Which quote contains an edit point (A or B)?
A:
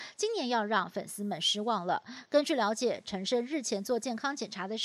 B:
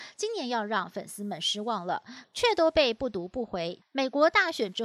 B